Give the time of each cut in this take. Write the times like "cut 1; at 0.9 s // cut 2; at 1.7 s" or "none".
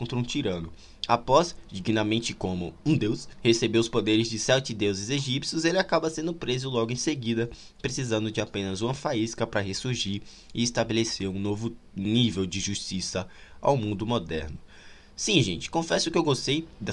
none